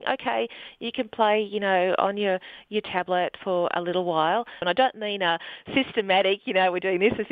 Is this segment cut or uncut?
cut